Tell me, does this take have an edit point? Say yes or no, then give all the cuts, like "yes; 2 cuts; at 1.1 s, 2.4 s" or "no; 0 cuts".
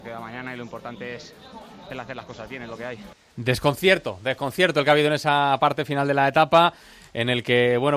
no; 0 cuts